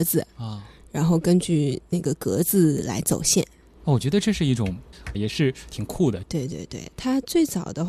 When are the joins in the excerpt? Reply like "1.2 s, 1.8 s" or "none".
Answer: 5.1 s, 6.2 s